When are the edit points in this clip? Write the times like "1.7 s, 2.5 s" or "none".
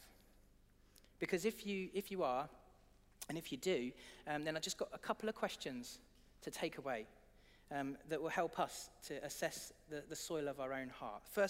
none